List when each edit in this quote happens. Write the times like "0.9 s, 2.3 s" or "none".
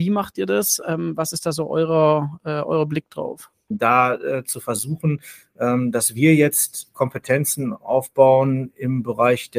3.7 s